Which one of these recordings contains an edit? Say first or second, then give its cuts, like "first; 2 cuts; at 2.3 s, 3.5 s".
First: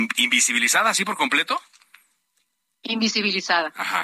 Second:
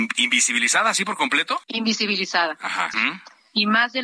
second; 2 cuts; at 1.6 s, 2.9 s